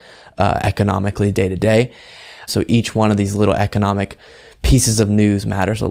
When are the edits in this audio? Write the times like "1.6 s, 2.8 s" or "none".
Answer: 2.5 s